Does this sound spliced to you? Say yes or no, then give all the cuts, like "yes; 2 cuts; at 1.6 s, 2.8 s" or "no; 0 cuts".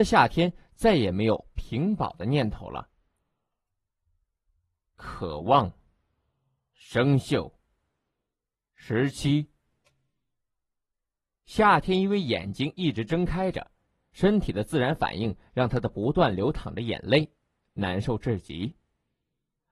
no; 0 cuts